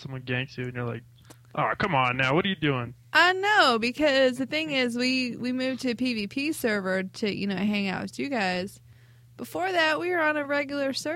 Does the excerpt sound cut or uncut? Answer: uncut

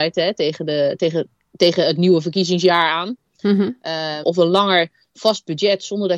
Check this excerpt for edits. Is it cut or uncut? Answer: cut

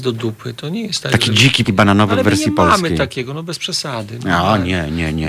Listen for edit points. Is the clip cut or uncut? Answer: cut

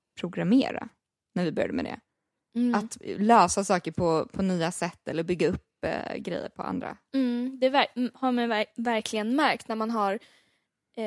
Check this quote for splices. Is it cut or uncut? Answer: uncut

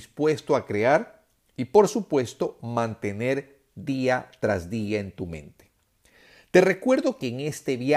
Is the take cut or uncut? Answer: uncut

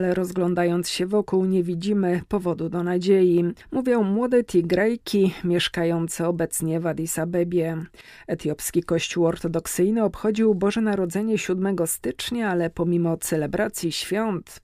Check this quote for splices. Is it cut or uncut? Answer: cut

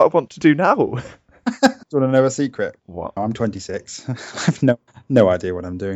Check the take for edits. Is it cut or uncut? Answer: cut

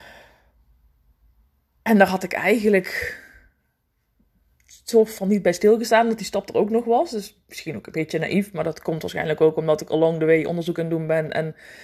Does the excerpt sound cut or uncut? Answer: uncut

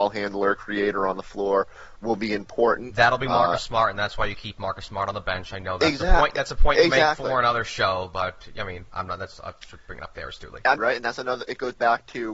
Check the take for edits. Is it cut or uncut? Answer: cut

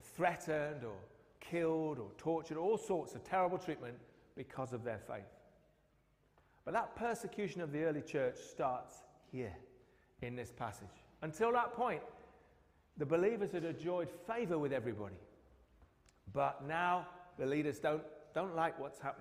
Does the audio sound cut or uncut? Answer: uncut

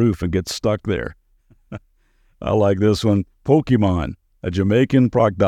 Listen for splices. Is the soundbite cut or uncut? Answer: uncut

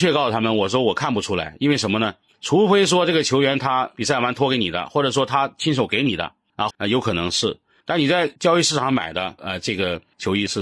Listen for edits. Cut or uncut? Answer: cut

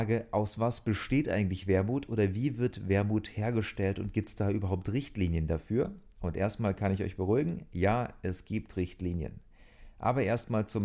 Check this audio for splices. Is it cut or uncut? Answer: uncut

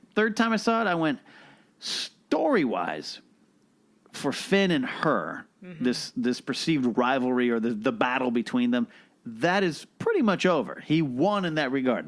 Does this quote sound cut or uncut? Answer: uncut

